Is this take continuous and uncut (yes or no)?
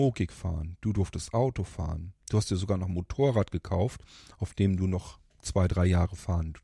yes